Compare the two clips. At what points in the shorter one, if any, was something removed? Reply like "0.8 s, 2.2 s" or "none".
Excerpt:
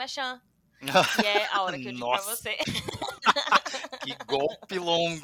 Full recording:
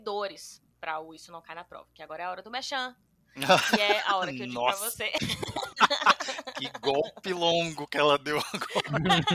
none